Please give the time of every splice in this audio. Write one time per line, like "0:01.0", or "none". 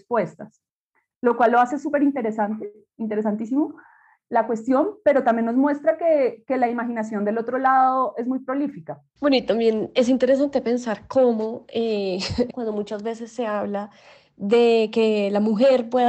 0:12.5